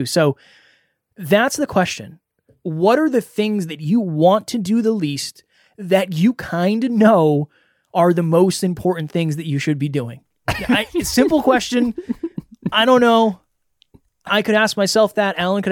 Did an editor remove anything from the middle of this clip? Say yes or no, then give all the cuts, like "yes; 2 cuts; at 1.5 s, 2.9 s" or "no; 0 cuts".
no; 0 cuts